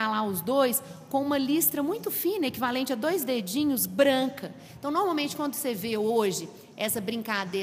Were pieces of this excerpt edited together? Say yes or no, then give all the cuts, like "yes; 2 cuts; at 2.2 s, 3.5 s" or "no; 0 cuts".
no; 0 cuts